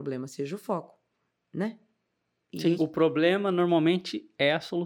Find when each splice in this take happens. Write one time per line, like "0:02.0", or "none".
0:02.8

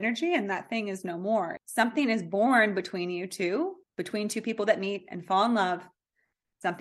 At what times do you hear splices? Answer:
0:01.6
0:03.8

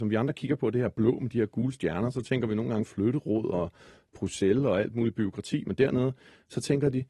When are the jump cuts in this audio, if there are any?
none

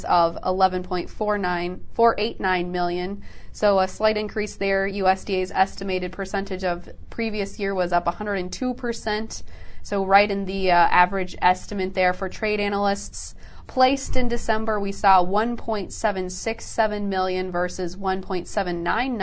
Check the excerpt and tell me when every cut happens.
none

